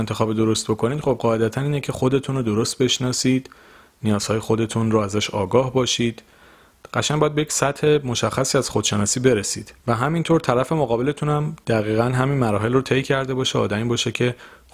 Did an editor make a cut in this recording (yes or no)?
yes